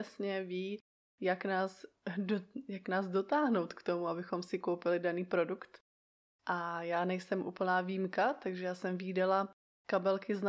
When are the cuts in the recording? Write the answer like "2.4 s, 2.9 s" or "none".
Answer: none